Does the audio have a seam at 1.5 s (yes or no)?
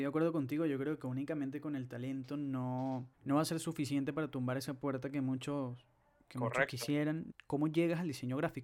no